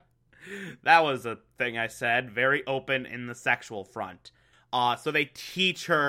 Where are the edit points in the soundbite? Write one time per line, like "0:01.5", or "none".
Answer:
0:04.5

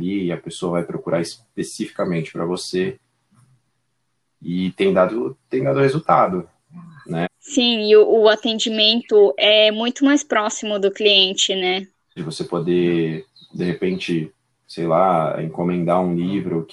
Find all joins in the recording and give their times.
0:07.2
0:12.2
0:15.4

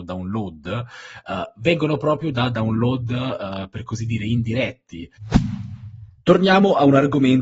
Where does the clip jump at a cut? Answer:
none

